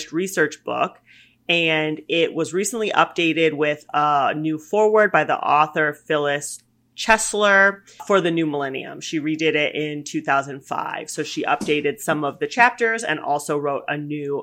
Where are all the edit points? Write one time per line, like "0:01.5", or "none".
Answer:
0:08.0

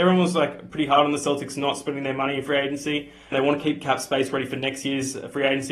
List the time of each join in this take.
0:03.3

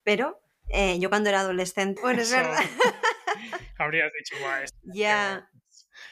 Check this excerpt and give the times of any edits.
0:02.0

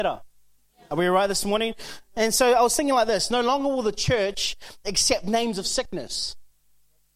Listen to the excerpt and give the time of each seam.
none

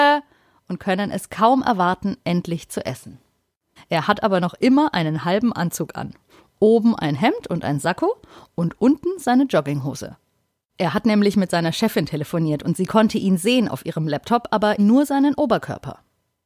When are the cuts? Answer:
0:03.8
0:14.8

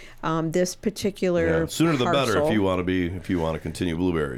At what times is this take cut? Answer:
none

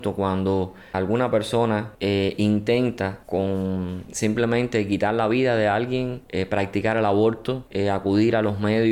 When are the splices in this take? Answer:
0:00.9

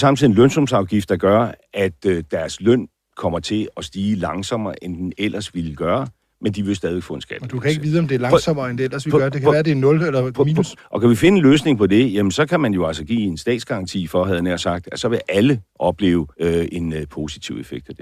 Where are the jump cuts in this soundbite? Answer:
0:10.8
0:16.3

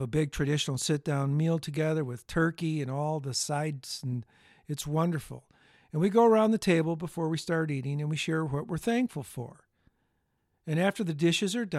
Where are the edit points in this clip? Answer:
none

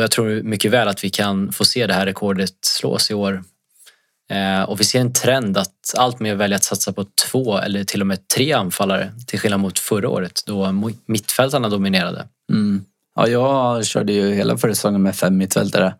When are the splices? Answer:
none

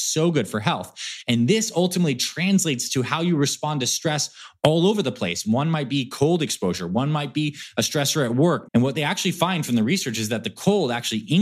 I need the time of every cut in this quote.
0:05.4
0:08.6

